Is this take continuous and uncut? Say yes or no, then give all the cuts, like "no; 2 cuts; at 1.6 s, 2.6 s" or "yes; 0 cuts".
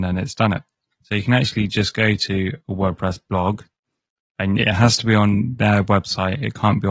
no; 2 cuts; at 0.9 s, 2.6 s